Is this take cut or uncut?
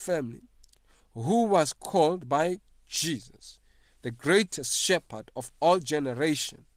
uncut